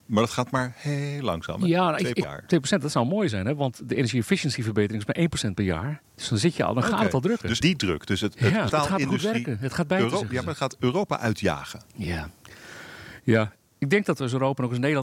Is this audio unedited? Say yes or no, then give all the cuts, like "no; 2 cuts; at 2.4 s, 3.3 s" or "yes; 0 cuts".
no; 3 cuts; at 2.2 s, 7.6 s, 8.7 s